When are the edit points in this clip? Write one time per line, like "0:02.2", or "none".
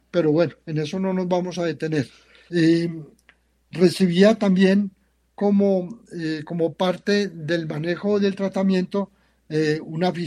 0:02.5

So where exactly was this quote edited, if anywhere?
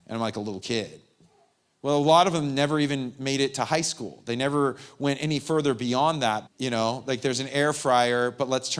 0:06.5

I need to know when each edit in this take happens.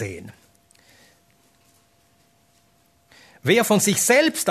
none

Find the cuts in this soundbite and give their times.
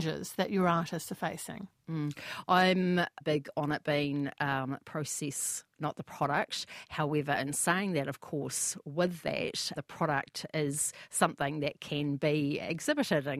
0:03.2
0:09.8

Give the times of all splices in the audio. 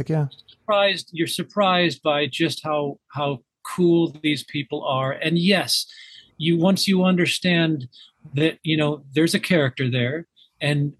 none

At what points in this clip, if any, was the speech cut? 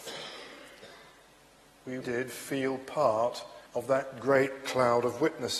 0:02.0
0:03.7

